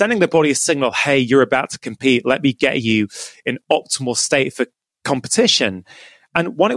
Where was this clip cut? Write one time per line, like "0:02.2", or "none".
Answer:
none